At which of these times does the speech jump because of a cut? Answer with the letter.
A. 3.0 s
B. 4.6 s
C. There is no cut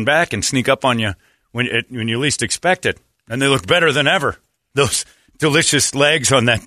C